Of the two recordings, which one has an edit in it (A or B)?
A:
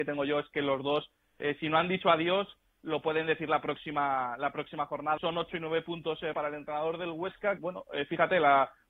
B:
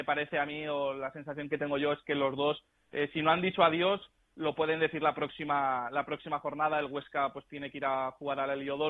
A